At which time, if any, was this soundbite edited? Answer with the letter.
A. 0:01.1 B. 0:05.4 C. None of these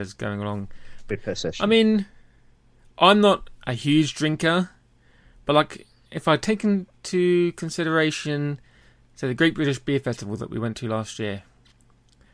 A